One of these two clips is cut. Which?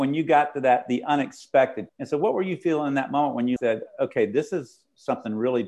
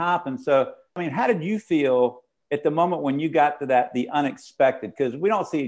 first; 2 cuts; at 1.9 s, 3.6 s

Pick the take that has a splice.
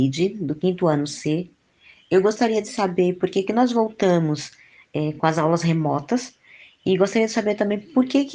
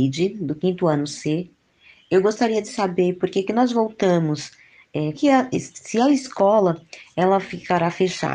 second; 1 cut; at 5.1 s

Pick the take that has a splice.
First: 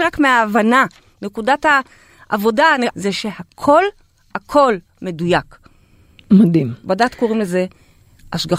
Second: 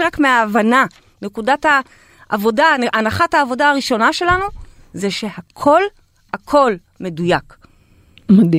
first; 1 cut; at 2.9 s

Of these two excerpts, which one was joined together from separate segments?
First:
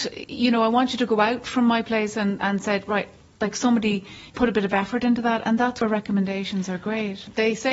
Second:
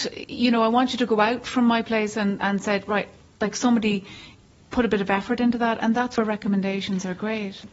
first; 1 cut; at 4.3 s

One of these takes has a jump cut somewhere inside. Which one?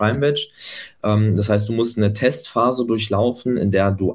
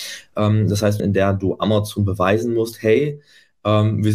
second; 1 cut; at 1.0 s

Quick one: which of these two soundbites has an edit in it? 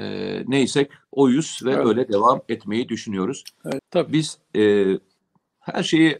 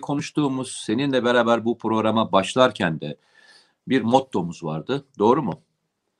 first; 1 cut; at 3.8 s

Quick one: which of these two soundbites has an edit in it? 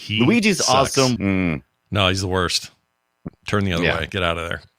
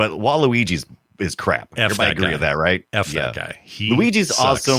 first; 2 cuts; at 1.2 s, 3.3 s

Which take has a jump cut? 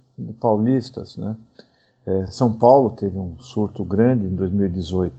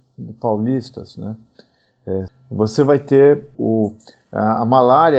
second; 2 cuts; at 2.3 s, 3.5 s

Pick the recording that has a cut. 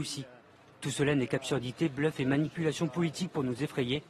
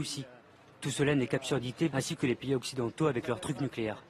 second; 1 cut; at 1.9 s

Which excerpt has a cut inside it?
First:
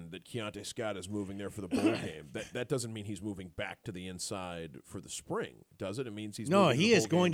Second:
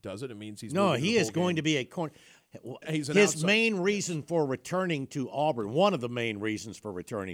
second; 1 cut; at 2.8 s

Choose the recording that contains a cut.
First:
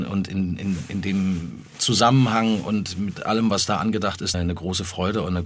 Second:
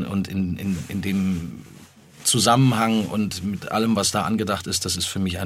first; 2 cuts; at 1.7 s, 4.3 s

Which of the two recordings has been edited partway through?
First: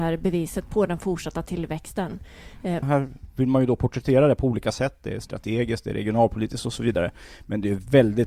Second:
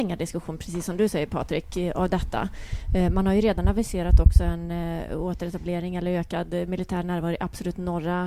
first; 1 cut; at 2.8 s

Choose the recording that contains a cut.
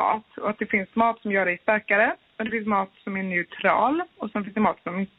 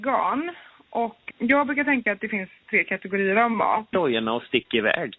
second; 2 cuts; at 1.3 s, 3.9 s

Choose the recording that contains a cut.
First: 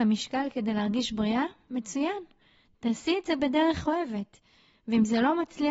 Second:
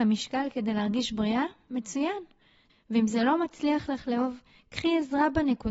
second; 1 cut; at 2.7 s

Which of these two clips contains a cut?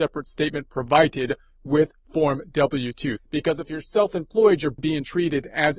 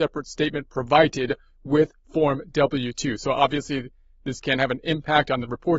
first; 2 cuts; at 3.2 s, 4.8 s

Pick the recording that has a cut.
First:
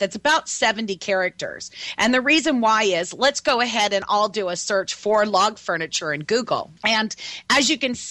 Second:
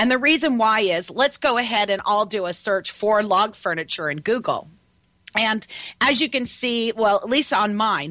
first; 1 cut; at 6.8 s

